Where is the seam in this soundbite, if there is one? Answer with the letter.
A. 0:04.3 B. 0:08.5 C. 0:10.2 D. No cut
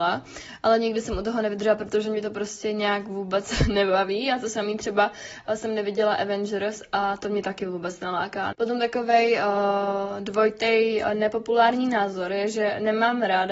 B